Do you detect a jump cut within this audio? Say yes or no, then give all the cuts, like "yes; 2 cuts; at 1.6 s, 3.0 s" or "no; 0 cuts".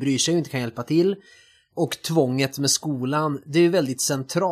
no; 0 cuts